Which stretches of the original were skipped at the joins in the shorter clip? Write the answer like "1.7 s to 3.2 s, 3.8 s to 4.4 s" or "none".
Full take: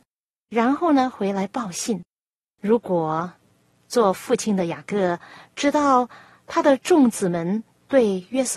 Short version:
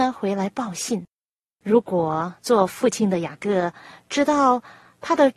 3.4 s to 3.8 s